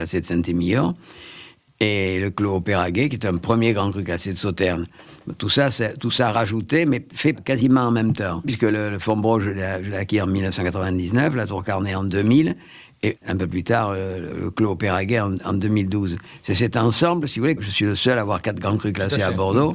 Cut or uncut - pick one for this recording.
cut